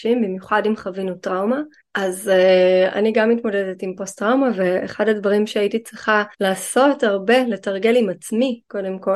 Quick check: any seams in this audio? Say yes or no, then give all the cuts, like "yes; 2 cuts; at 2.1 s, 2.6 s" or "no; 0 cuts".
yes; 2 cuts; at 1.8 s, 6.3 s